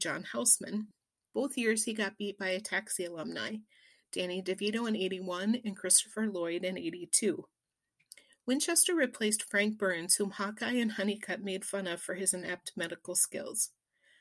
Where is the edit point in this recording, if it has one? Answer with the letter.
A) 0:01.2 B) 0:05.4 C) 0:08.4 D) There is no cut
A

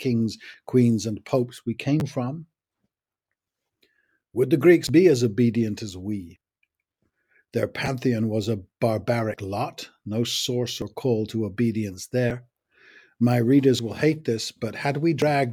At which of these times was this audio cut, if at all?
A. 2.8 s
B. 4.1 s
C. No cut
C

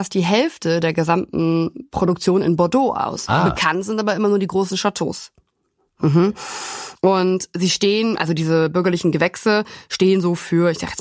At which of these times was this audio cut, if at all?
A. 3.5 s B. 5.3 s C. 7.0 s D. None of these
D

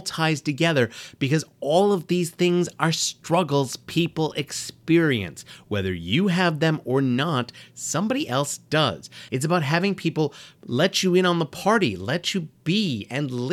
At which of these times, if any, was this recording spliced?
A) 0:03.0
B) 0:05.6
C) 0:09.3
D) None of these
C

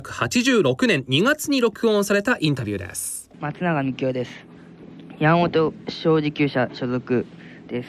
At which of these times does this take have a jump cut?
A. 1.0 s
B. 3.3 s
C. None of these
B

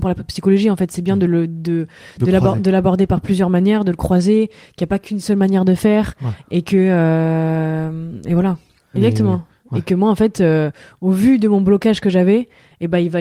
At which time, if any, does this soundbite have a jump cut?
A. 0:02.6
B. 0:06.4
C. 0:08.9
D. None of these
C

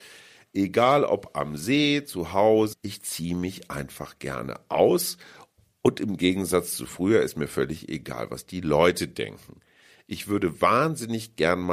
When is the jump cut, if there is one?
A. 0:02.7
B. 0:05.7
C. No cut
A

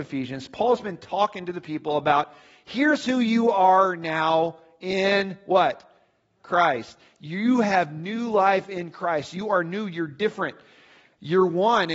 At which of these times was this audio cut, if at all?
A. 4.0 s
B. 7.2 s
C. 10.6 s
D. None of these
D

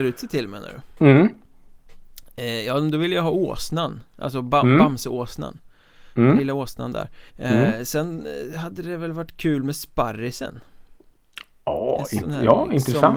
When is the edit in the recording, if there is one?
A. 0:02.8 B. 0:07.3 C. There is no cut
B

